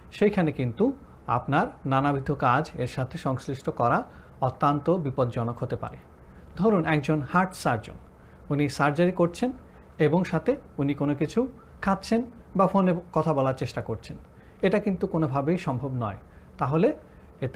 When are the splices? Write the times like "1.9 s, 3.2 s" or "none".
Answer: 10.3 s